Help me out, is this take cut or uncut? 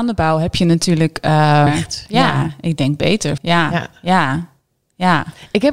cut